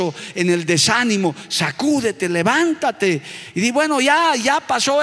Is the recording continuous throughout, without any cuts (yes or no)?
yes